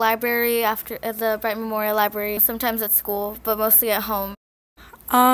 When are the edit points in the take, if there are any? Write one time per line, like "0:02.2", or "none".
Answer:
0:02.4